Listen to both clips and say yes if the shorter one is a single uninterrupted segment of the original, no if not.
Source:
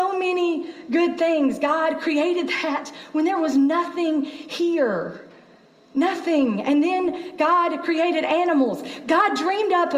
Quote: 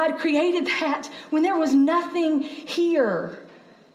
yes